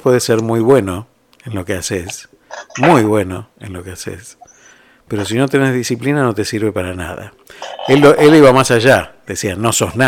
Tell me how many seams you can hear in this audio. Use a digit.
0